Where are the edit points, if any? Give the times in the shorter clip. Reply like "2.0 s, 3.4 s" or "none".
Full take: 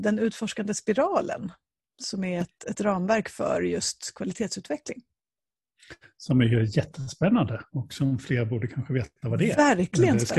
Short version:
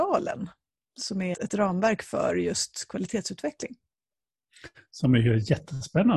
1.3 s